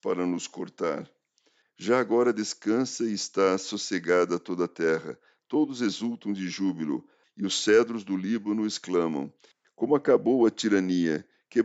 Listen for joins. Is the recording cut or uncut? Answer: cut